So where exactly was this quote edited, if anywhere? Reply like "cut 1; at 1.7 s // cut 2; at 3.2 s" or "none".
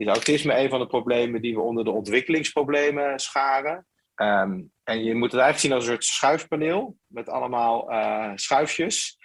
cut 1; at 4.1 s